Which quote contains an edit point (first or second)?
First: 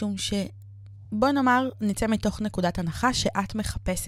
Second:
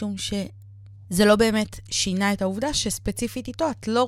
second